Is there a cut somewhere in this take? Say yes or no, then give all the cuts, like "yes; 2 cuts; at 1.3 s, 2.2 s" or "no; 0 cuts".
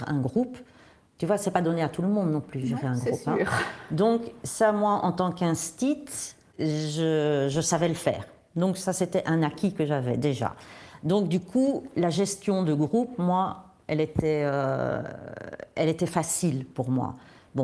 no; 0 cuts